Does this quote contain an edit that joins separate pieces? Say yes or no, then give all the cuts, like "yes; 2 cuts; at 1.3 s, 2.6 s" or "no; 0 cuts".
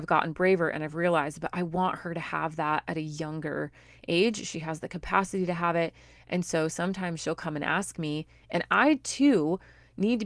no; 0 cuts